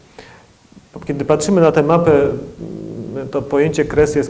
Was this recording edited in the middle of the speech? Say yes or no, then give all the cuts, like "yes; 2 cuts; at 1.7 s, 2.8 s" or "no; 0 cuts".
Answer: no; 0 cuts